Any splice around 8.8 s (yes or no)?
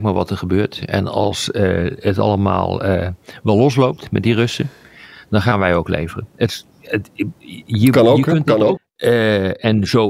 yes